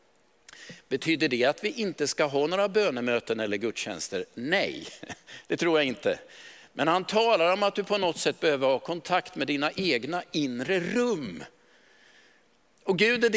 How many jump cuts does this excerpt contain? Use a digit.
0